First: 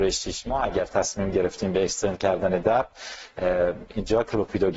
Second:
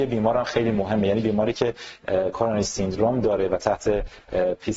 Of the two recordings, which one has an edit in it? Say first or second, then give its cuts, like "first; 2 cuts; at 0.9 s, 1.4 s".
second; 1 cut; at 2.0 s